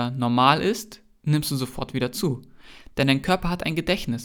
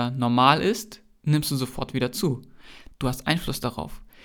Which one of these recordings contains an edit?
second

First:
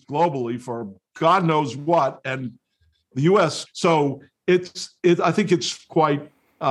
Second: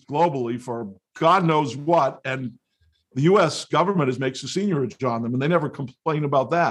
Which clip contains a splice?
first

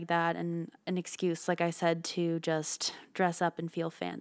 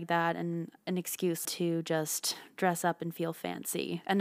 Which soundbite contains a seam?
second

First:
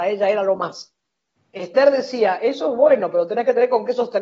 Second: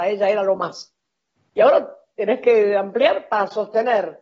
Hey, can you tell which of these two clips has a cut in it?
second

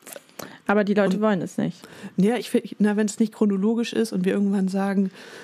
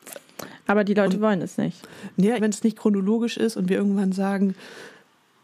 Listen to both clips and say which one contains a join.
second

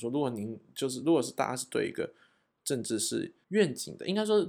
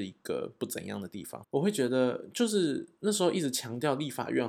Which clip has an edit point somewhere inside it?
second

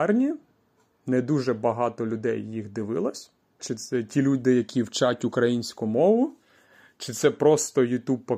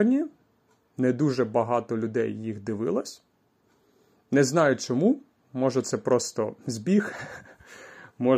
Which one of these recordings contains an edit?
first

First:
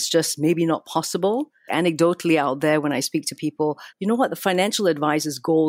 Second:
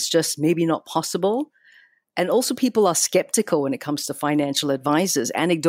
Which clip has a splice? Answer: first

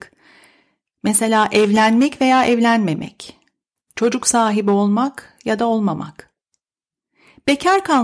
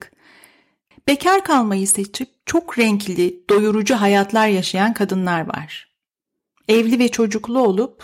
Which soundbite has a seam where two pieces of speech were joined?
second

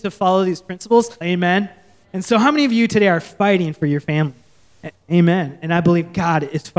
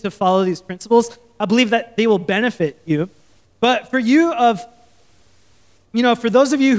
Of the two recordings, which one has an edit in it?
first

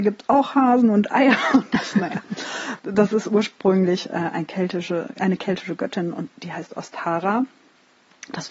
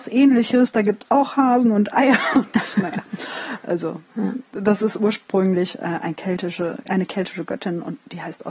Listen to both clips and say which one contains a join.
first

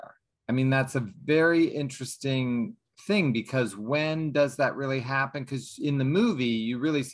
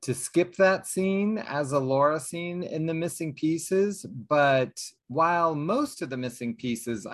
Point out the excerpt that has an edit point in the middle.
second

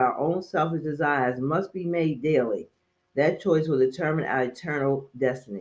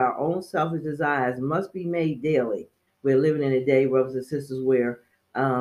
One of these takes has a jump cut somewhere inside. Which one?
second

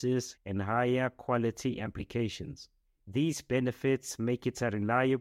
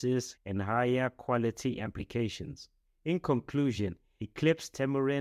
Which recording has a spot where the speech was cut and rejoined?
first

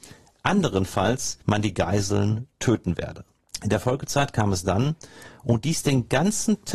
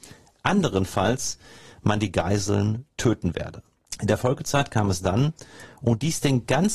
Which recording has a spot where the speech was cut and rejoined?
first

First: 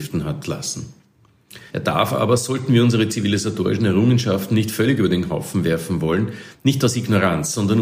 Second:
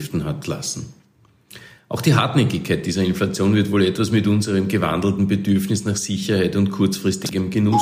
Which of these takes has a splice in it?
first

